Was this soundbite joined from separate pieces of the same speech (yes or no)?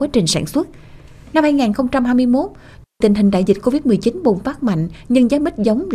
no